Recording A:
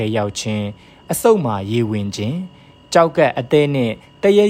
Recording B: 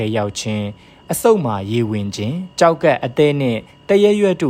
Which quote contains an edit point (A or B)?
B